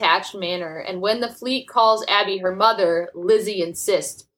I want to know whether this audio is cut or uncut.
uncut